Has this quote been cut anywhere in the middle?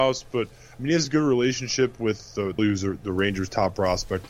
yes; 1 cut; at 2.6 s

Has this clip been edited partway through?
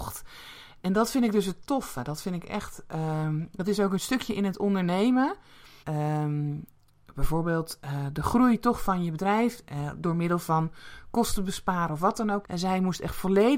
yes; 2 cuts; at 5.8 s, 12.4 s

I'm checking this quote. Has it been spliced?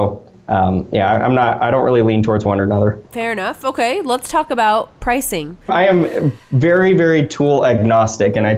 yes; 1 cut; at 5.7 s

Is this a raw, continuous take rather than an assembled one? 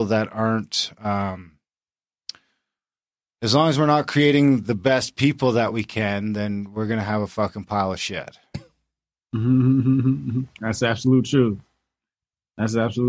yes; 0 cuts

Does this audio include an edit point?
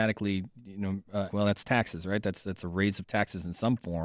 yes; 1 cut; at 1.3 s

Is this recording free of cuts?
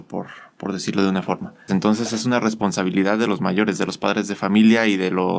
no; 1 cut; at 1.7 s

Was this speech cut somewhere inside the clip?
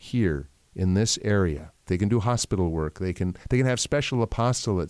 yes; 1 cut; at 1.9 s

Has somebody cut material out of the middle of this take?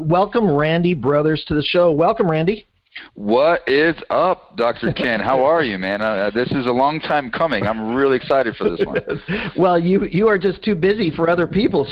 no; 0 cuts

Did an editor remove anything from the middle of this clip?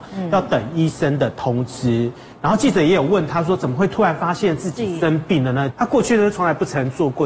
yes; 1 cut; at 5.7 s

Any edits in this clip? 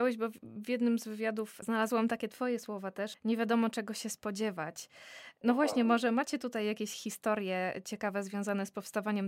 yes; 1 cut; at 3.1 s

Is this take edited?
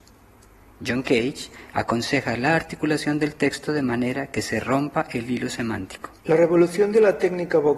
yes; 1 cut; at 6.2 s

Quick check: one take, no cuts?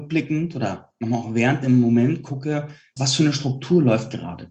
no; 1 cut; at 3.0 s

